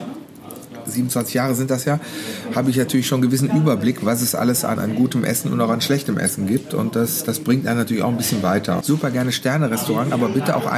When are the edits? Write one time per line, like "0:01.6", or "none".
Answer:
0:04.8
0:08.8